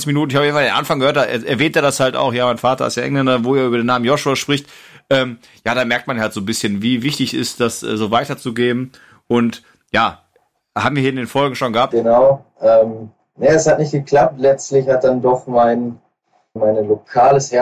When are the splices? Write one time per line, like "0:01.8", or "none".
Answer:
0:11.9
0:16.6